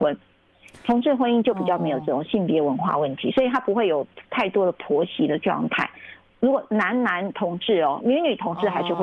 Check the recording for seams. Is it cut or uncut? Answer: cut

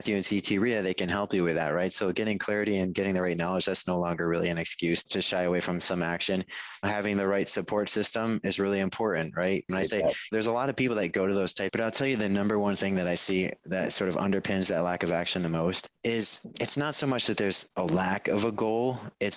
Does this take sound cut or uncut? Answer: cut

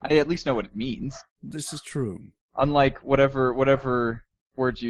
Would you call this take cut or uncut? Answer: uncut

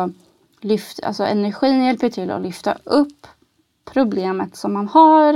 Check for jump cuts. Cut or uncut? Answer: uncut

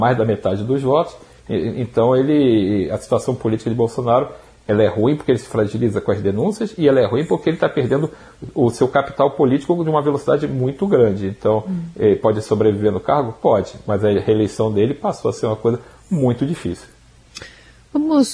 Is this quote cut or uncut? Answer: uncut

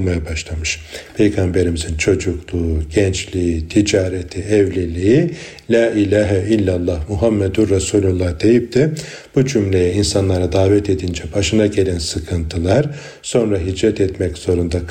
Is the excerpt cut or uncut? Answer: uncut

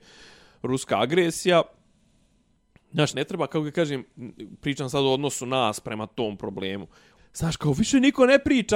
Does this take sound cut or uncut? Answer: cut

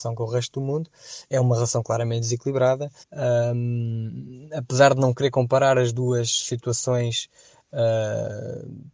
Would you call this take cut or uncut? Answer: cut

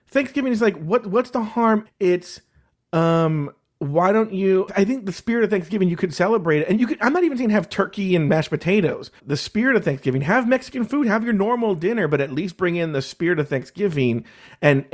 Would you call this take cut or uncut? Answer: cut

